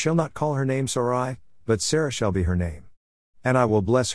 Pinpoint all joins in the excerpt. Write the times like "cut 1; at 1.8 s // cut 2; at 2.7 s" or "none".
none